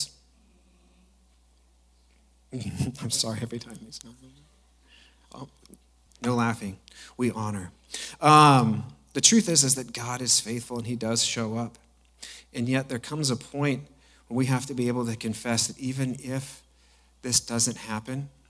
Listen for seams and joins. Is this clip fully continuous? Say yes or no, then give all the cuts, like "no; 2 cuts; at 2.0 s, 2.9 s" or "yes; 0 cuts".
yes; 0 cuts